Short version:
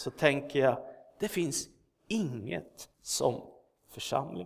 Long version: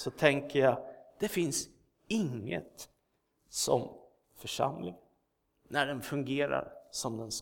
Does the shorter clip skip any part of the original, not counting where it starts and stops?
yes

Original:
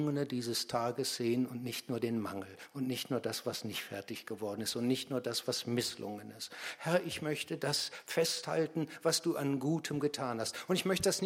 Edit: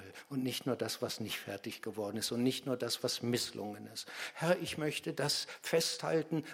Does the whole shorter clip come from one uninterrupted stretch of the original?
yes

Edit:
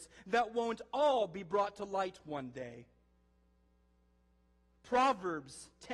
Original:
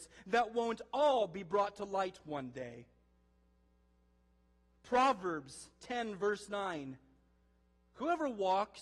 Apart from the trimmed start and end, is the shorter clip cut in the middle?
no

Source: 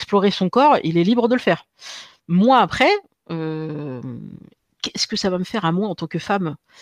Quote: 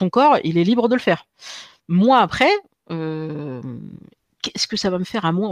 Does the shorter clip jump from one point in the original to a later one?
no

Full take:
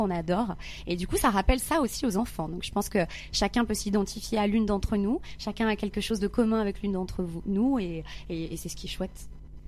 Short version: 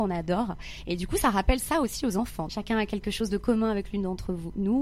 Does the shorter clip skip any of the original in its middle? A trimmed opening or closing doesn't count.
yes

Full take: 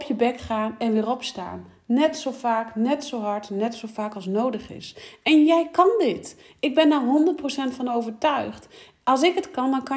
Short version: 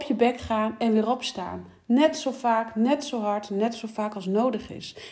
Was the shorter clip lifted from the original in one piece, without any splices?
yes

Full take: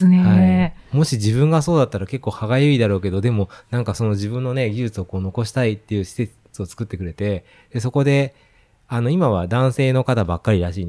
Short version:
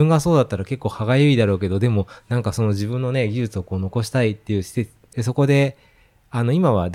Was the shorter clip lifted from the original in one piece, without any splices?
no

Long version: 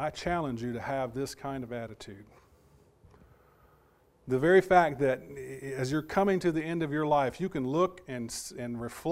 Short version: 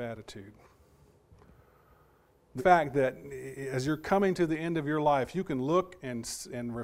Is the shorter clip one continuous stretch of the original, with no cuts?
no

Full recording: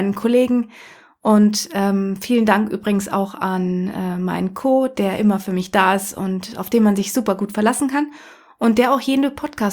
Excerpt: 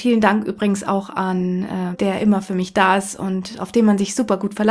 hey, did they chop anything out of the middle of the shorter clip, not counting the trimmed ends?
yes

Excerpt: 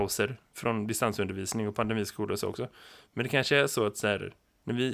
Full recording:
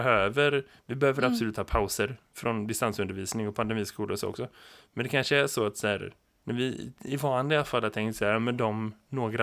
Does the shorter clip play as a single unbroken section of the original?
yes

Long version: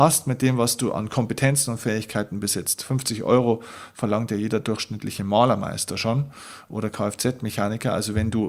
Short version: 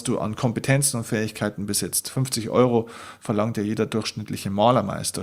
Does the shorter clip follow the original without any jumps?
yes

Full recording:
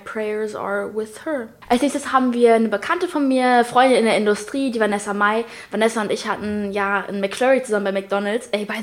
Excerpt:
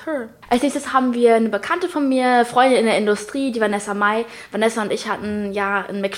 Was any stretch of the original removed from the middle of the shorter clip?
no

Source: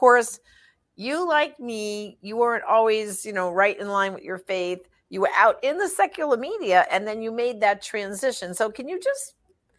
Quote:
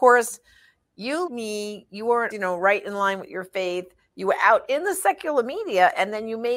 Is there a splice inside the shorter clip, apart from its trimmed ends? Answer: yes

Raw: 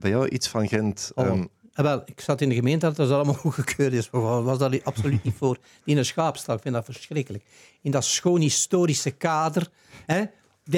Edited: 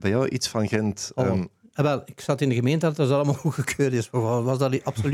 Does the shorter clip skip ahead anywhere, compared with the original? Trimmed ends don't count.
no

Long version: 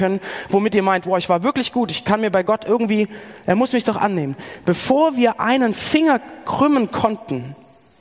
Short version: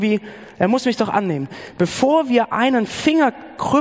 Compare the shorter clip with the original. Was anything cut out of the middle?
no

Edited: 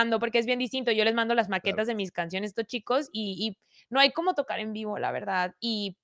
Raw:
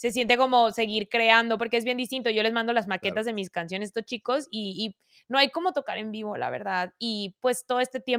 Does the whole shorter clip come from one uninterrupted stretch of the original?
yes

